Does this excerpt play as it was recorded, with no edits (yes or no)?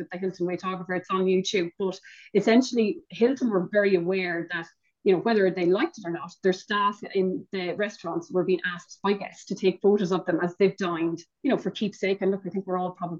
yes